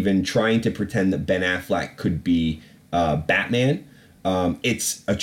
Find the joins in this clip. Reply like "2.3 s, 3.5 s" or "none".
none